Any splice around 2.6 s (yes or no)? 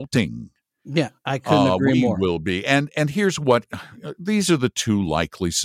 no